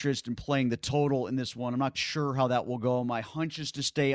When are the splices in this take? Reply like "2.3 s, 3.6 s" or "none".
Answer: 1.9 s